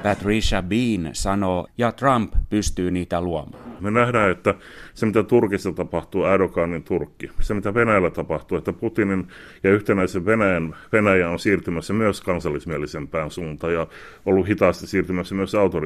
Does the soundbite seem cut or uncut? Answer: cut